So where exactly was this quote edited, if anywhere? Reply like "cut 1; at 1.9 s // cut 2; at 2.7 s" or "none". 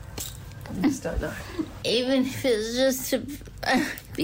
cut 1; at 1.8 s